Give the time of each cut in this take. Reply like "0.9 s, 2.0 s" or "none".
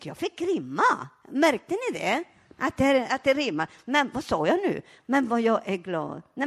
none